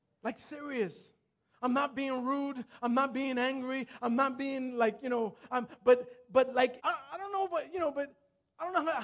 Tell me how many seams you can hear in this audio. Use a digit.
1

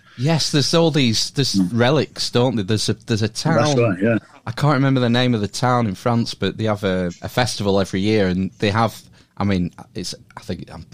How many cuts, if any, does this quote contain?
2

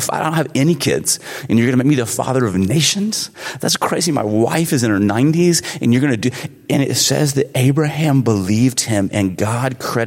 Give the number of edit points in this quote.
0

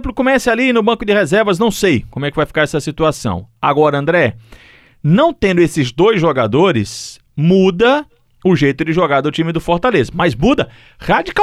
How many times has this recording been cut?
0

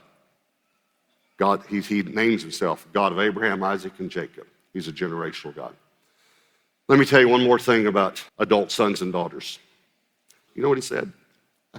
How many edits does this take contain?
2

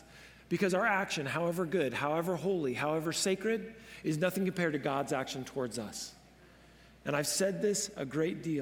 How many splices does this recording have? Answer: 0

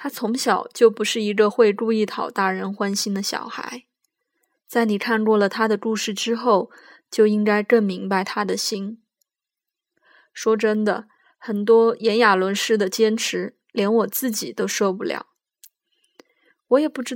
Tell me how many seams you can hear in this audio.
0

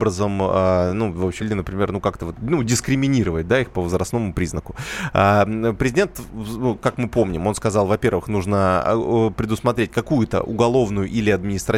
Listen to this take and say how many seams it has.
1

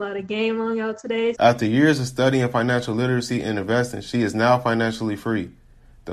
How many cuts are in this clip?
1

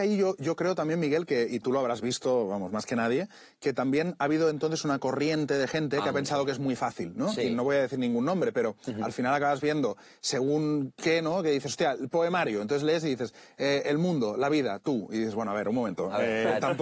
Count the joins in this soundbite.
0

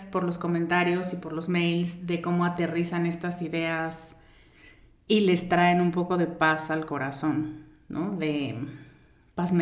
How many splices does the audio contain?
0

